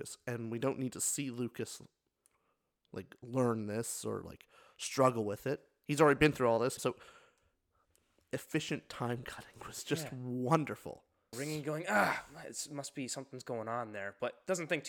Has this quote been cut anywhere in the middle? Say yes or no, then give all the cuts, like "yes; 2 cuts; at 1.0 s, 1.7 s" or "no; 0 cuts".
yes; 2 cuts; at 6.8 s, 11.3 s